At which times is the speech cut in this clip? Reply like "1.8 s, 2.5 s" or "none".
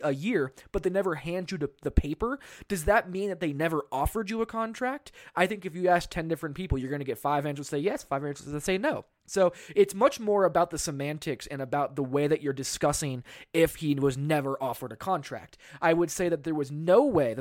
none